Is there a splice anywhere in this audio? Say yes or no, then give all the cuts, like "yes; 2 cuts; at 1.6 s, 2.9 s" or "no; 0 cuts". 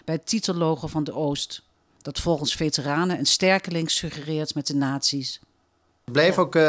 no; 0 cuts